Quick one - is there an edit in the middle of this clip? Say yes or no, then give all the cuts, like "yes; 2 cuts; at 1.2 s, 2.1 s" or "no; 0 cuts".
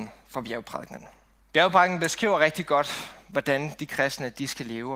yes; 1 cut; at 1.4 s